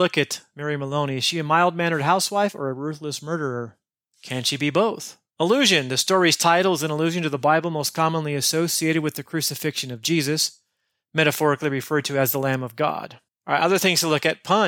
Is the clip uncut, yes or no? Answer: no